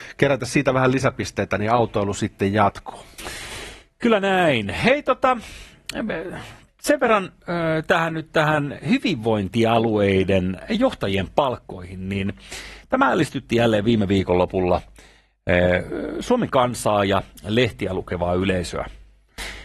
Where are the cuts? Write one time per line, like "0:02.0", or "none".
none